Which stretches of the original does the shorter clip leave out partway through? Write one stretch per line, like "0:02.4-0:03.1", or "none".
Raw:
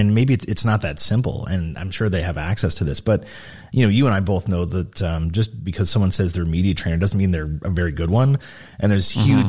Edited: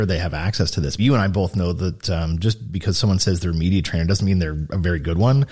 0:03.0-0:03.9

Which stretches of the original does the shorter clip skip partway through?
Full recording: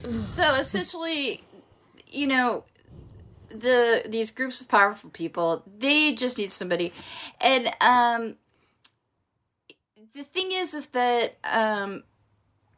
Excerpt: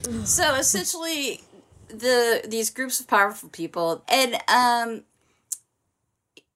0:01.7-0:03.3
0:05.6-0:07.4

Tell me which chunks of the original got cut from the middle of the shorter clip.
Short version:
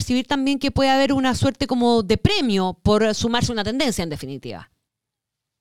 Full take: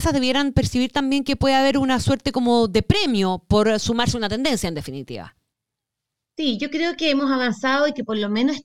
none

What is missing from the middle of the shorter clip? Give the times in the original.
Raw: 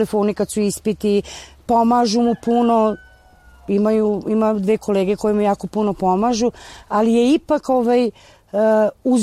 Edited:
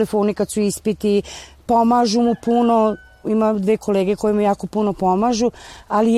0:03.2-0:04.2

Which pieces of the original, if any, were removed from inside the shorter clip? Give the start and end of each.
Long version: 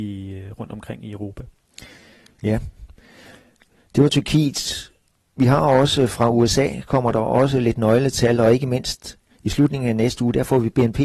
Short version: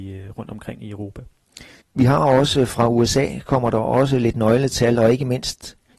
0:02.0-0:05.2

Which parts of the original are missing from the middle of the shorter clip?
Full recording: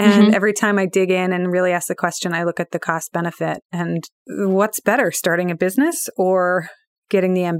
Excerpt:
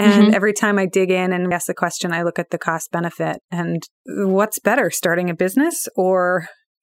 0:01.5-0:01.7

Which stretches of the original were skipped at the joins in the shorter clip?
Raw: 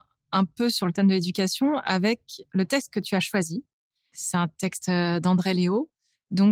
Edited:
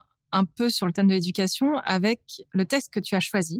none

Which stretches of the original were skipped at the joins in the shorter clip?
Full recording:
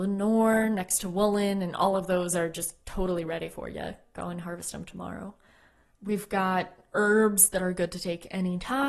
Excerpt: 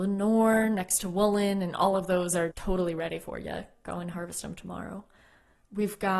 0:02.5-0:02.8

